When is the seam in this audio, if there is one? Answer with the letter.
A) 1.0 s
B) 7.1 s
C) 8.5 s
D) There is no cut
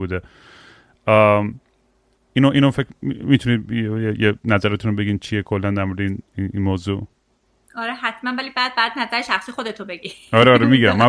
D